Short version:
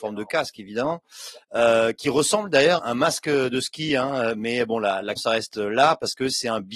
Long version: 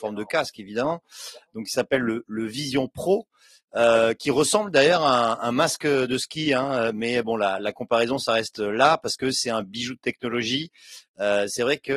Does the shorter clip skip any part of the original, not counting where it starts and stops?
yes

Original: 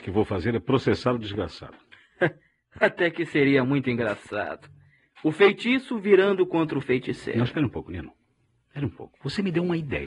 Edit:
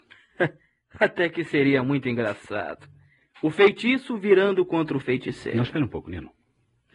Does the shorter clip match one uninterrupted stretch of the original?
yes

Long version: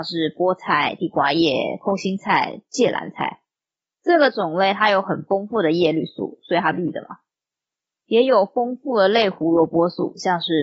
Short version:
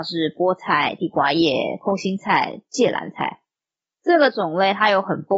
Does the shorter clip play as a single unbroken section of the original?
yes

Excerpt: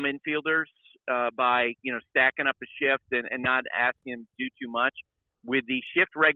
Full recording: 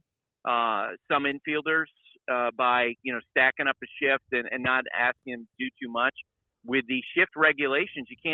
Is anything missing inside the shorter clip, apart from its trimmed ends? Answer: no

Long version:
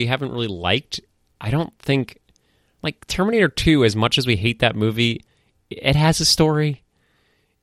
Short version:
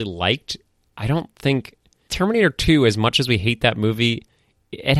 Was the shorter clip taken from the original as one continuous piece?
no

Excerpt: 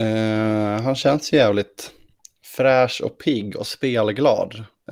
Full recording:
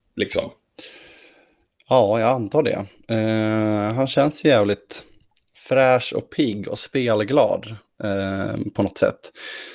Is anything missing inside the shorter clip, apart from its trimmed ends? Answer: no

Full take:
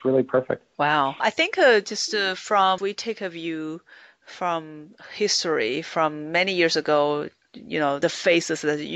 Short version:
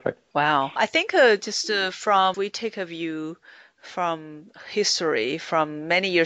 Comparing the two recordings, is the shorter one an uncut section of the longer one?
yes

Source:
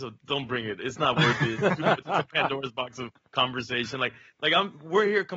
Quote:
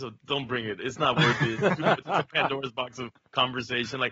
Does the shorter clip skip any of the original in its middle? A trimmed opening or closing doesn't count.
no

